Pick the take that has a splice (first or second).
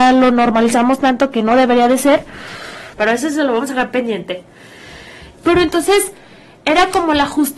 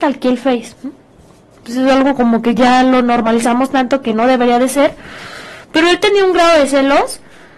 first